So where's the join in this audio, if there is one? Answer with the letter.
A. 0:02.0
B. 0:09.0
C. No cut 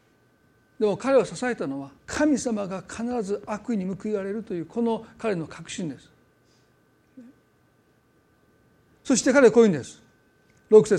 A